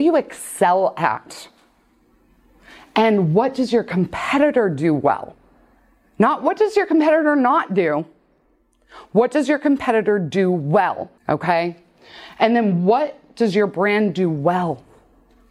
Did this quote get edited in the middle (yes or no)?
yes